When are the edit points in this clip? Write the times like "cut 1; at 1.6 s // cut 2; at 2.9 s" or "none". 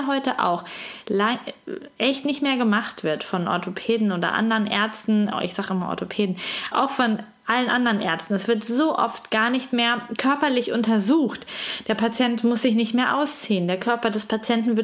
cut 1; at 6.7 s